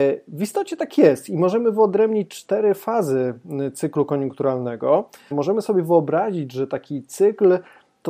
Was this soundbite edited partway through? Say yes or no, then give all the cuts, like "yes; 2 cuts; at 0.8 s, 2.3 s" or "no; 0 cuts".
yes; 1 cut; at 5.3 s